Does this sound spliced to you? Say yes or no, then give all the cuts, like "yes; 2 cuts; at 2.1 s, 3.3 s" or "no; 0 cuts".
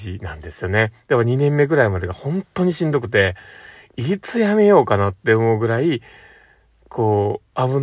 yes; 1 cut; at 1.0 s